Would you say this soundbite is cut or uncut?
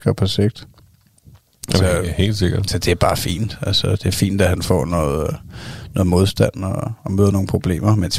uncut